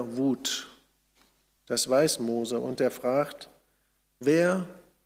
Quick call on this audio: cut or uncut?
cut